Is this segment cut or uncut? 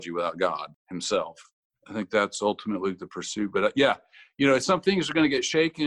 uncut